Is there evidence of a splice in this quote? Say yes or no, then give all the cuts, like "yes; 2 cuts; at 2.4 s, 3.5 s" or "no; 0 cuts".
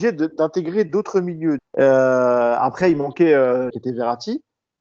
yes; 2 cuts; at 1.6 s, 3.7 s